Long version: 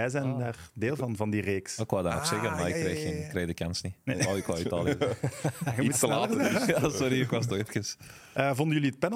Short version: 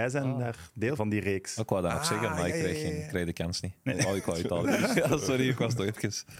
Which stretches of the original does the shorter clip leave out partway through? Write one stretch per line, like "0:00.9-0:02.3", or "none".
0:01.0-0:01.2
0:04.8-0:06.4